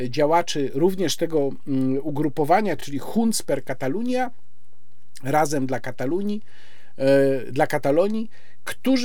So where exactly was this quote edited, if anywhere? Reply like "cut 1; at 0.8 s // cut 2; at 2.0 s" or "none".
none